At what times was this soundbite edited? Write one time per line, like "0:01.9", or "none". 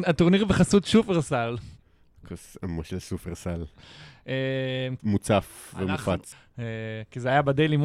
0:05.0
0:06.3